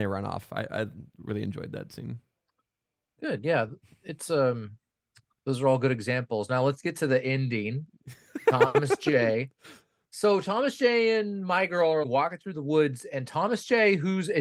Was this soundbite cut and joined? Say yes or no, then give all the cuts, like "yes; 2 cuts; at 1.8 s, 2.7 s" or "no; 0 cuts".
yes; 1 cut; at 12.0 s